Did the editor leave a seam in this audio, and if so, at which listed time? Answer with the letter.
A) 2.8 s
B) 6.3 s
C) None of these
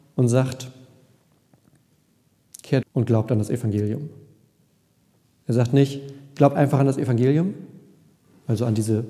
A